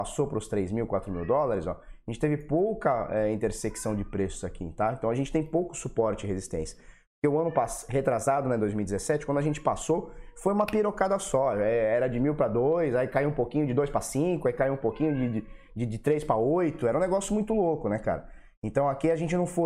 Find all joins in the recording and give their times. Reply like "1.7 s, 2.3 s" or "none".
none